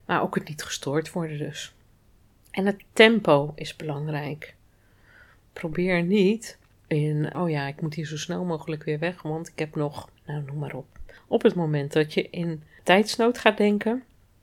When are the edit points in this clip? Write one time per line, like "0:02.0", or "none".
0:07.3